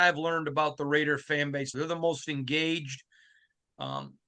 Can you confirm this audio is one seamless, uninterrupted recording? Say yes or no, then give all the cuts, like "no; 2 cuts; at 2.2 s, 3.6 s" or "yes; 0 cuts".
no; 1 cut; at 1.7 s